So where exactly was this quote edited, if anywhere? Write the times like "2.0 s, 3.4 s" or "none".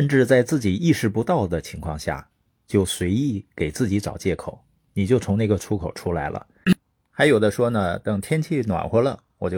6.6 s